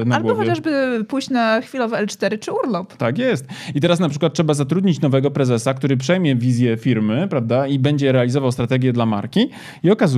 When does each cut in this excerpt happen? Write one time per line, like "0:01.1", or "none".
none